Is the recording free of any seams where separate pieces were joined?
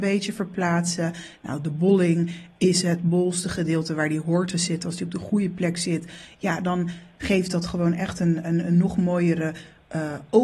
yes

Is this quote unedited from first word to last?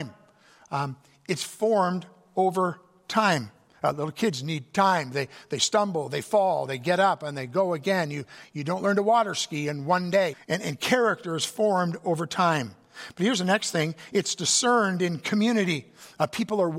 no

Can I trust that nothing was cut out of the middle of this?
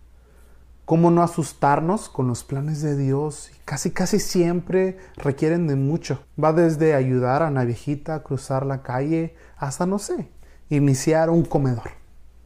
no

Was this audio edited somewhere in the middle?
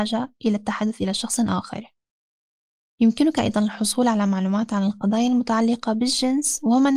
no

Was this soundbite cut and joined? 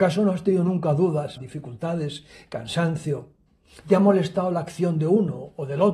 yes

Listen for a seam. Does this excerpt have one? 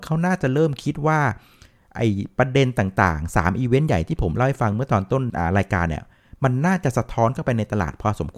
no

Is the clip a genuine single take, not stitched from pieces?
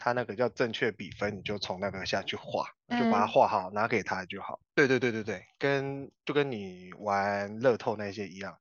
no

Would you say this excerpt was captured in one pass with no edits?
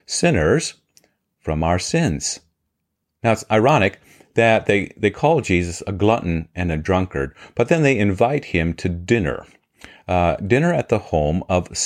yes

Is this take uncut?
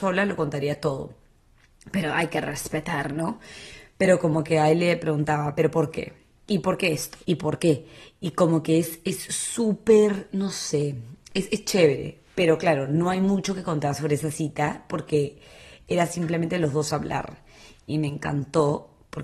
no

